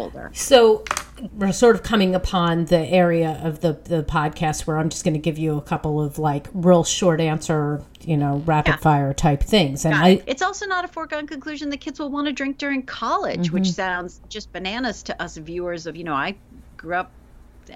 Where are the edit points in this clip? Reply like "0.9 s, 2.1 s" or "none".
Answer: 1.3 s, 10.2 s